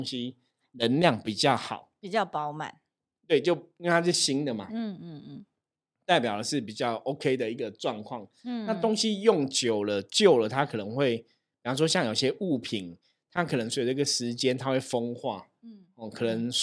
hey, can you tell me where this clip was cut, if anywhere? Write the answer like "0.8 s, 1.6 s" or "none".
none